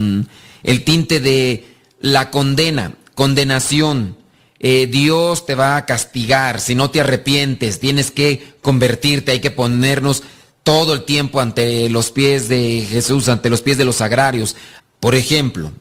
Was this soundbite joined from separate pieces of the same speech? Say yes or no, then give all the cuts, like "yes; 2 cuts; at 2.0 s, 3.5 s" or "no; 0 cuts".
yes; 1 cut; at 14.8 s